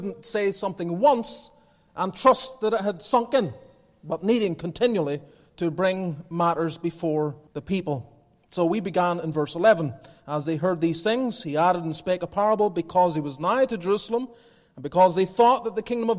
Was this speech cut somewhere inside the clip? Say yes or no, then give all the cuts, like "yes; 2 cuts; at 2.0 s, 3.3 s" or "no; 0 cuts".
yes; 1 cut; at 7.5 s